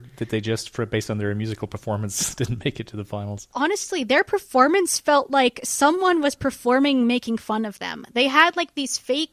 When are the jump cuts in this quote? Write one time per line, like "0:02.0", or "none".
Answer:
0:03.5

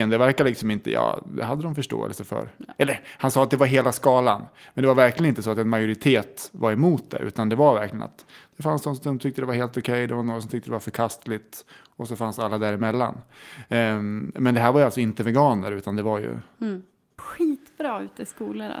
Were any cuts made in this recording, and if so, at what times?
0:17.2

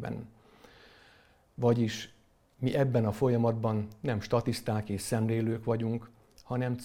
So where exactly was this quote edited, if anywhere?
none

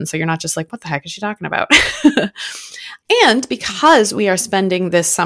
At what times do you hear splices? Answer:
none

